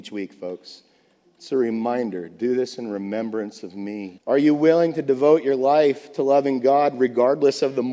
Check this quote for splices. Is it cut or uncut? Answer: cut